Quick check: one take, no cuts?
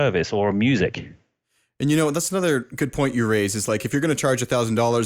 yes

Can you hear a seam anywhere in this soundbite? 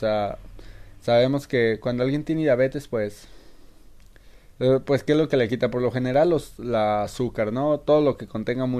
no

